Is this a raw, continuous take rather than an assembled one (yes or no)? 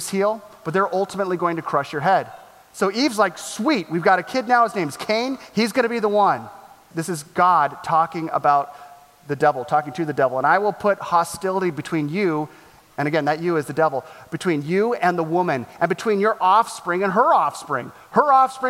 no